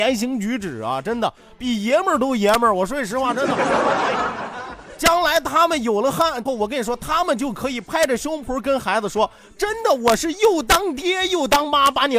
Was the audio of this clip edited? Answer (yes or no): yes